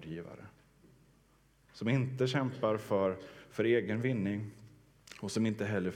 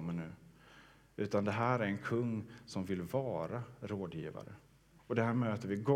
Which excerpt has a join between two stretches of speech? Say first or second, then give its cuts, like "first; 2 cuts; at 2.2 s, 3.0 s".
second; 1 cut; at 5.0 s